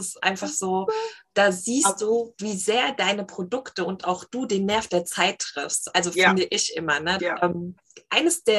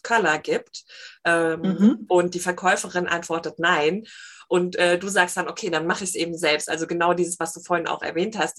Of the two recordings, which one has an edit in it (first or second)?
first